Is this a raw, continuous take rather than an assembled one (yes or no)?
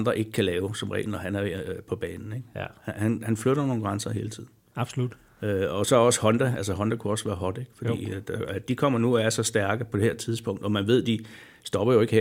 yes